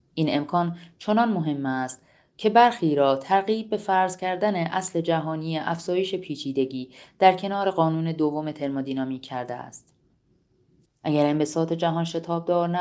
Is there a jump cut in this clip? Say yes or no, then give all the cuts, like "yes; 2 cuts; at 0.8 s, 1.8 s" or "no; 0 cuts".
yes; 1 cut; at 10.9 s